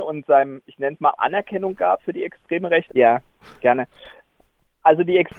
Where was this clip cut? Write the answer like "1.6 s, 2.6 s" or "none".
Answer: 1.2 s, 2.9 s